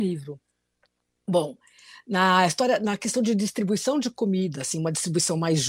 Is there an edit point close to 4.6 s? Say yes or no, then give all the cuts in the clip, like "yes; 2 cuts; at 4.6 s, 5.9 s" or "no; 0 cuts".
no; 0 cuts